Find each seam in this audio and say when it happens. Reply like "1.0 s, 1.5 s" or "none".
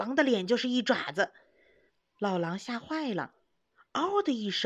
none